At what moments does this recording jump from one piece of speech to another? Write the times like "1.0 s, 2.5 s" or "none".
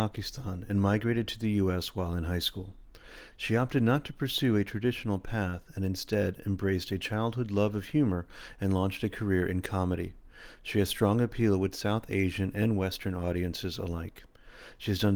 none